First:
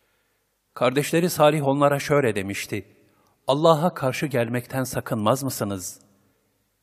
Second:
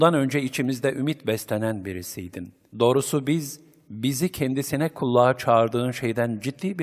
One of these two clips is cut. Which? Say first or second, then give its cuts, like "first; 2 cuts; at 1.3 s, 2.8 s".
second; 1 cut; at 2.7 s